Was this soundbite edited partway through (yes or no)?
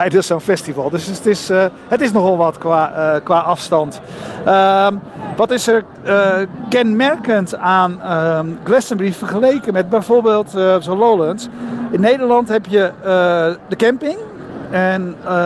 no